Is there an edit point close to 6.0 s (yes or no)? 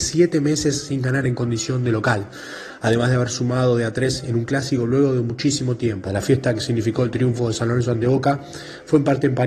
yes